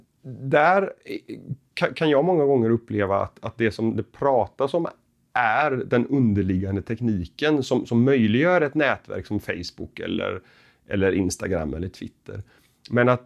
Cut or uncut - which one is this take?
uncut